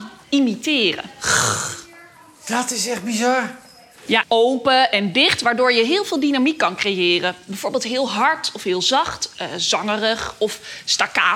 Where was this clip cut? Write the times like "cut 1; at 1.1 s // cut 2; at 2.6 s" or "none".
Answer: cut 1; at 4.2 s